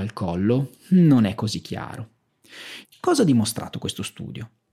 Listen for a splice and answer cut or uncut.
cut